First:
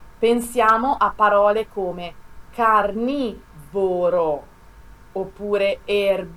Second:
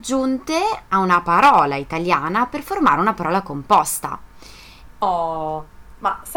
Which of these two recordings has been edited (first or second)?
second